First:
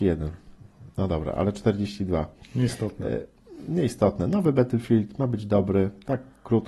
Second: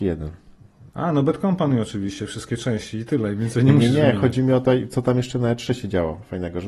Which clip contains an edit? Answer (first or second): second